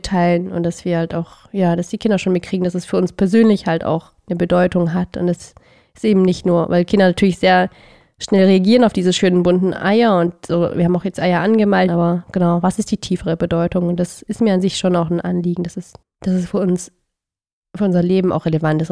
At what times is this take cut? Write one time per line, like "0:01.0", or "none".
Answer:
0:11.9
0:16.0